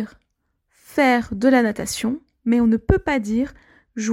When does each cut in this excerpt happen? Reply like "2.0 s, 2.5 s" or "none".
none